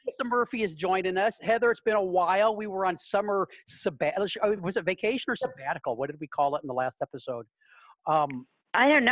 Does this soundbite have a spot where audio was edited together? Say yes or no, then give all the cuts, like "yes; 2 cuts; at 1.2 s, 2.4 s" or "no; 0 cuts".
no; 0 cuts